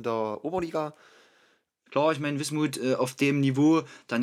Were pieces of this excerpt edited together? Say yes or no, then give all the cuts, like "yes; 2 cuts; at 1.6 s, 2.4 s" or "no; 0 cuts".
yes; 1 cut; at 1.9 s